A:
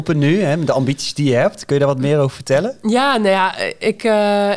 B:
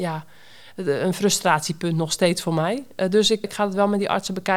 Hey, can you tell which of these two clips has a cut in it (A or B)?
B